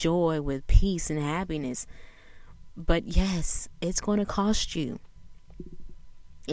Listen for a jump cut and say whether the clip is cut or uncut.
uncut